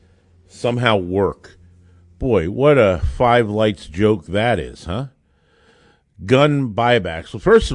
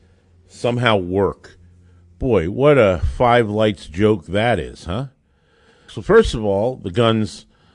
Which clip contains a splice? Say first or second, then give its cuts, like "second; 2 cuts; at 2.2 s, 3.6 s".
second; 1 cut; at 5.9 s